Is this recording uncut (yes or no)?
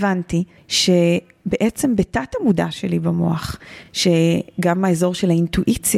yes